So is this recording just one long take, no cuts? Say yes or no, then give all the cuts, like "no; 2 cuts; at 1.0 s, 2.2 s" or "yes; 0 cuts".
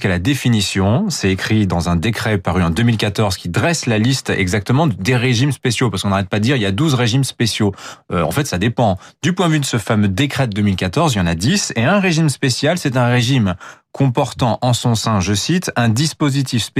yes; 0 cuts